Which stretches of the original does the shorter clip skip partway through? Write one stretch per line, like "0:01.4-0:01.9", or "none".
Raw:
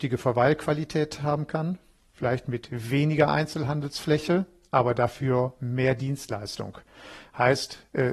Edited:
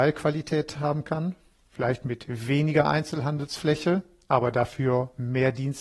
none